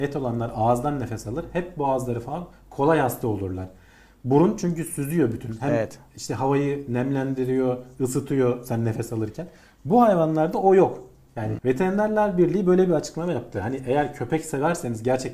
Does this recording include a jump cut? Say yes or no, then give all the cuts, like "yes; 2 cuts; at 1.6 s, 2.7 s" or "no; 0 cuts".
yes; 1 cut; at 11.6 s